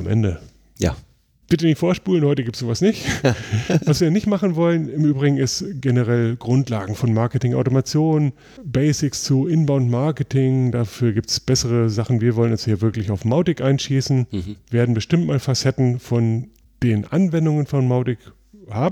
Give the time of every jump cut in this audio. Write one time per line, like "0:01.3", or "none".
none